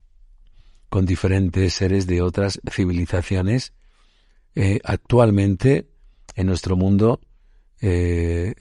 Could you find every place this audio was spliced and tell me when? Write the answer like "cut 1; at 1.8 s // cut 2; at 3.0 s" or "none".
none